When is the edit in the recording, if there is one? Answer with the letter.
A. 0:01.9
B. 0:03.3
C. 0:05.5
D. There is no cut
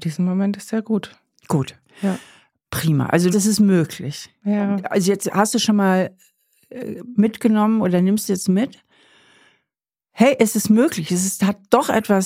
B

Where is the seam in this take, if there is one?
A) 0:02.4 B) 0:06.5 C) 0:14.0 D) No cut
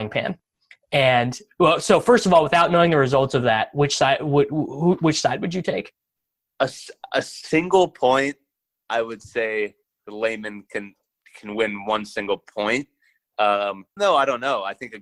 C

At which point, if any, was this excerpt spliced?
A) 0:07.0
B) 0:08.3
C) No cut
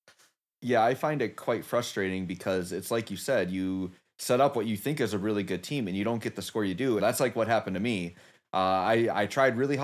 A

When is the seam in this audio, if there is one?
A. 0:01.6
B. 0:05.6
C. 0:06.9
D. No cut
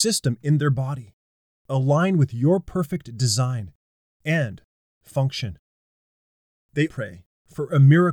C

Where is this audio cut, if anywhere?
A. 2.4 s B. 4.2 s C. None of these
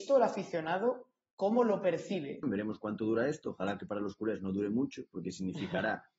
A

